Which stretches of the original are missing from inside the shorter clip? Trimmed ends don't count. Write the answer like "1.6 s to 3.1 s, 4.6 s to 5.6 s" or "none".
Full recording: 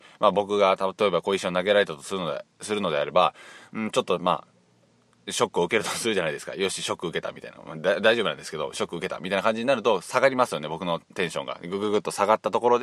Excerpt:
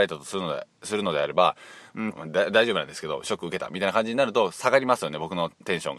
3.9 s to 7.6 s